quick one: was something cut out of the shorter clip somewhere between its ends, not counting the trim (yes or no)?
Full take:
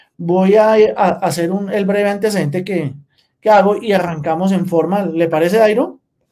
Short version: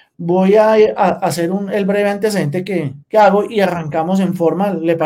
yes